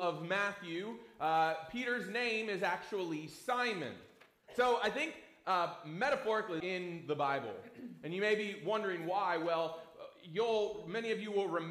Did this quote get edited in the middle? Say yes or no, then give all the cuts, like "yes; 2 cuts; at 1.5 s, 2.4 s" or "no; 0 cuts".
yes; 2 cuts; at 4.4 s, 6.6 s